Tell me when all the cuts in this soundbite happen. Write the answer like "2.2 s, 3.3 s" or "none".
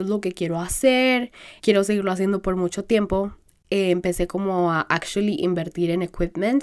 1.6 s